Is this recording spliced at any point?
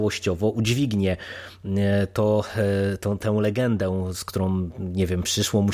no; 0 cuts

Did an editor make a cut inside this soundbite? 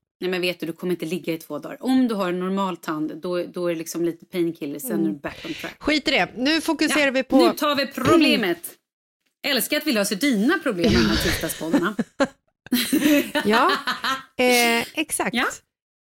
no; 0 cuts

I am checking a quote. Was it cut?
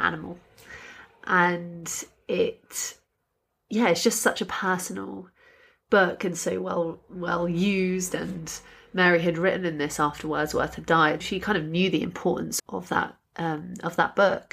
yes; 2 cuts; at 11.2 s, 12.6 s

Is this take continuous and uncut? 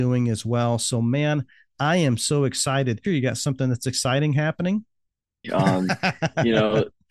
no; 2 cuts; at 3.0 s, 5.4 s

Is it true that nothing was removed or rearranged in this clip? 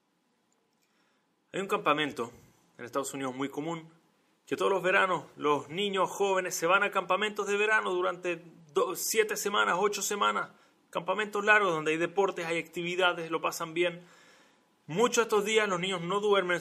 yes; 0 cuts

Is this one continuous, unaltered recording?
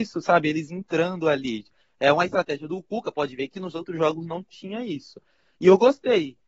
yes; 0 cuts

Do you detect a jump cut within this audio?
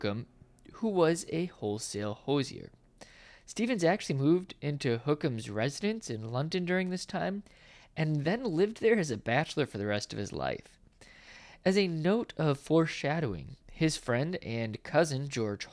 no; 0 cuts

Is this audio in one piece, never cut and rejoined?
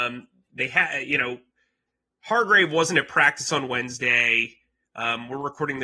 yes; 0 cuts

